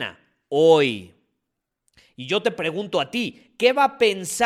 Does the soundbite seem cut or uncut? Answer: uncut